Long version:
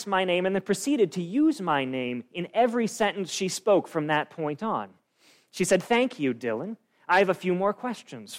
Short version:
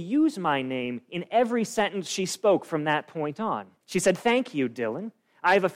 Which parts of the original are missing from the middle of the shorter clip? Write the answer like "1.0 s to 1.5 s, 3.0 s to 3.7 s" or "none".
5.0 s to 5.5 s